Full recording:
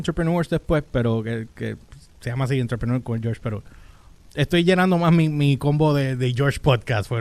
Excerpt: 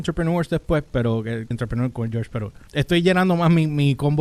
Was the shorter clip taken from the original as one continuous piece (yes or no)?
no